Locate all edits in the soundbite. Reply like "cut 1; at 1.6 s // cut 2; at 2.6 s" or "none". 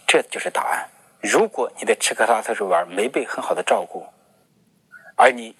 cut 1; at 1.2 s